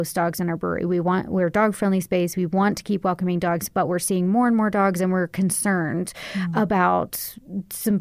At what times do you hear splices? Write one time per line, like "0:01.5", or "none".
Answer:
none

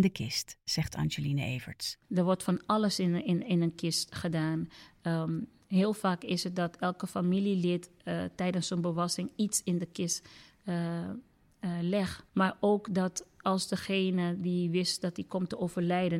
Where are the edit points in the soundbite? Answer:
0:02.0
0:12.3

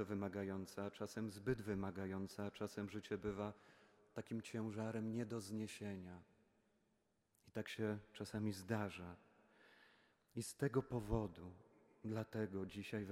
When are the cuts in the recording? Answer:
none

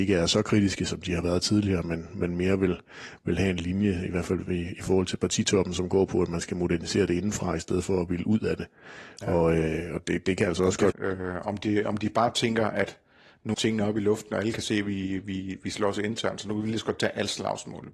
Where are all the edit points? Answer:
0:10.9
0:13.5

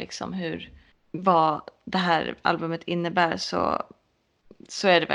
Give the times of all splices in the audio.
none

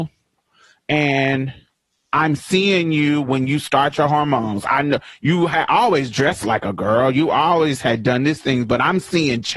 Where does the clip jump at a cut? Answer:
none

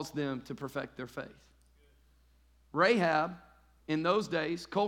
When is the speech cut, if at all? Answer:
0:03.8

